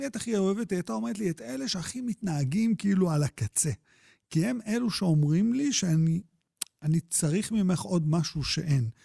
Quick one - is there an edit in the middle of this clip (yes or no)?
no